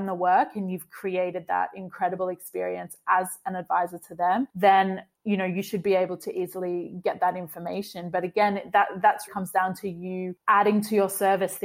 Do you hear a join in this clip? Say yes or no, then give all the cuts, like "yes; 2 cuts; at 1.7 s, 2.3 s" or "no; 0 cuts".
yes; 2 cuts; at 5.1 s, 9.3 s